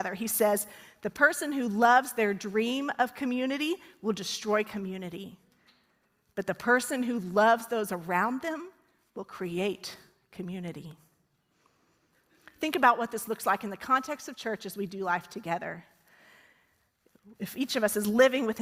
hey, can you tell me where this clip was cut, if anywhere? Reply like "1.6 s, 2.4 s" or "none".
none